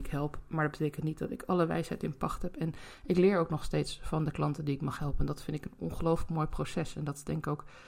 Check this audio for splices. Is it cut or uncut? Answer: uncut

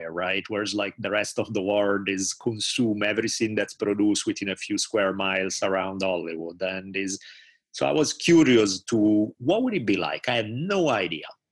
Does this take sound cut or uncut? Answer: uncut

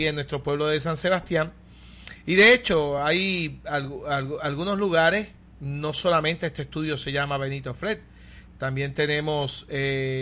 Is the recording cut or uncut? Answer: uncut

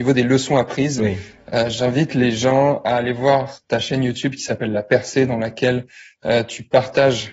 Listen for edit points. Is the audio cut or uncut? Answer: uncut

